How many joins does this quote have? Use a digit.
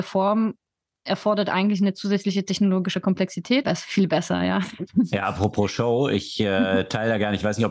1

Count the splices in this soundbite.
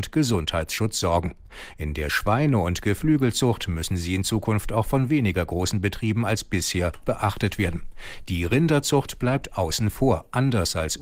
0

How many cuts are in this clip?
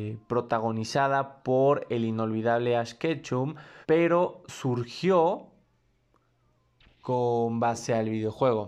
1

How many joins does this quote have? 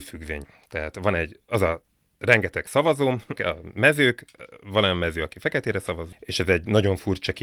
2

